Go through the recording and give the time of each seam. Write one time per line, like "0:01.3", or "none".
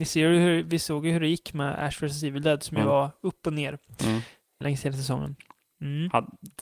0:04.6